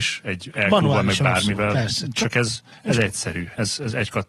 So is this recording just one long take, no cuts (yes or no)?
yes